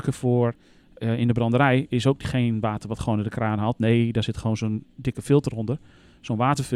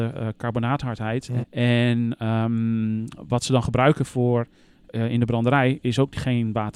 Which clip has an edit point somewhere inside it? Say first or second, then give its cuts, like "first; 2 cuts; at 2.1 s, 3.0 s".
second; 1 cut; at 1.4 s